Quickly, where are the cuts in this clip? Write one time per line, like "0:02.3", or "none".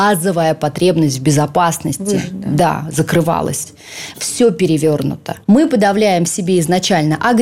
0:04.1
0:05.4